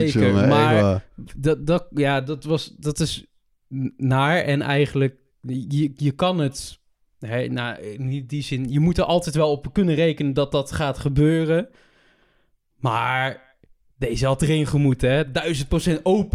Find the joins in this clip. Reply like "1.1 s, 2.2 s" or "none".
none